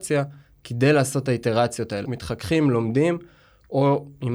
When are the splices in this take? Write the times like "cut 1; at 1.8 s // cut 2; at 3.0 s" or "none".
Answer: cut 1; at 2.0 s